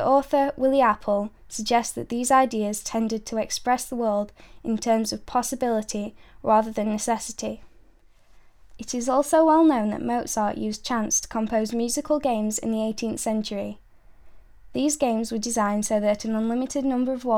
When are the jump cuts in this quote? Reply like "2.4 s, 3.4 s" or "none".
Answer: 8.8 s